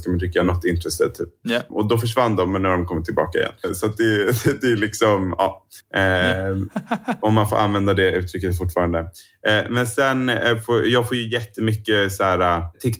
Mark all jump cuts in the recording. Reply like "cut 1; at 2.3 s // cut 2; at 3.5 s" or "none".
cut 1; at 1.7 s // cut 2; at 5.8 s